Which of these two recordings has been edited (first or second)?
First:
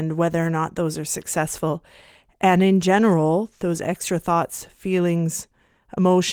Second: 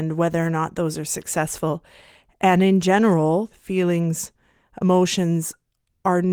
second